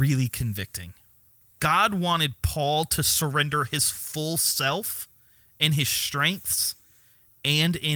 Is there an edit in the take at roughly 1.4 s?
yes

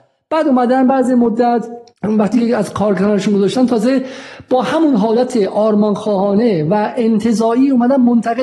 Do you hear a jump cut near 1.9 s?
yes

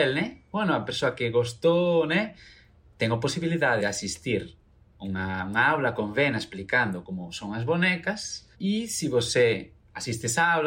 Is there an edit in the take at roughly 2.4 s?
no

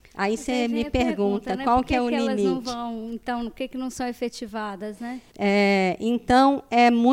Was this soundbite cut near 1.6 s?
no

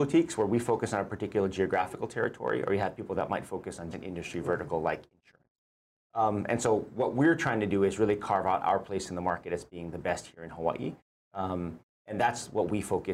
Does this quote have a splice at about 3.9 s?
yes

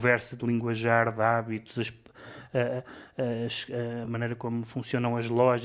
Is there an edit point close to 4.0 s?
no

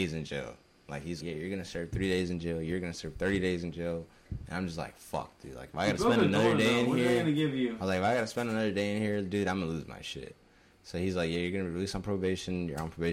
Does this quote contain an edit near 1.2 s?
yes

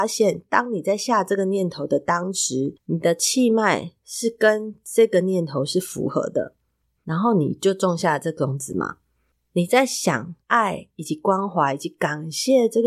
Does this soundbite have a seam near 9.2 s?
no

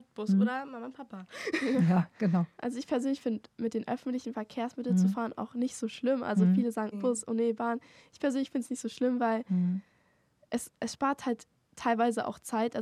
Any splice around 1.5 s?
no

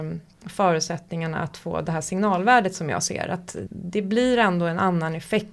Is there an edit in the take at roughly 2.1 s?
no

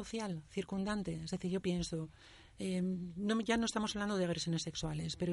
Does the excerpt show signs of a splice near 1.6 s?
yes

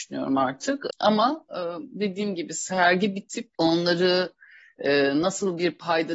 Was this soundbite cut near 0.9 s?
yes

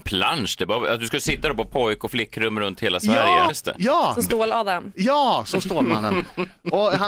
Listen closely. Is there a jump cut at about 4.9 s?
no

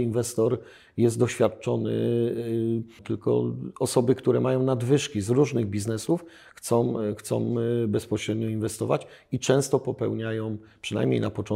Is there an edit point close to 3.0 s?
yes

